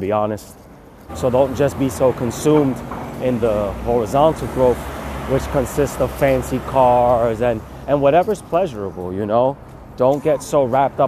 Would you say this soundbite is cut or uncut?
cut